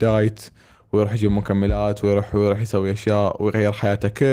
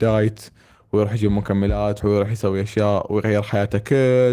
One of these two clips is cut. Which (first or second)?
second